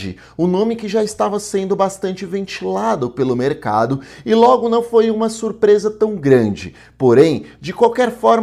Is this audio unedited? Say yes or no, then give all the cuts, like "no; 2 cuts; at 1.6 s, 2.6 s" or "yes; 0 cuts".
yes; 0 cuts